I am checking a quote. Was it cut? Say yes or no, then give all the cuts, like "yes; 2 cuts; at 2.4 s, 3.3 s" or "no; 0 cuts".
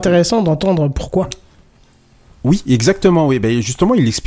no; 0 cuts